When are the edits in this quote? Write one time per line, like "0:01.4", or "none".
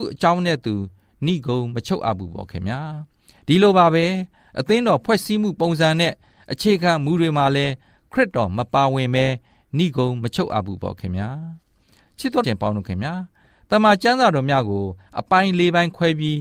0:12.4